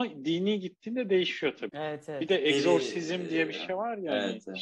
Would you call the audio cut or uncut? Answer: cut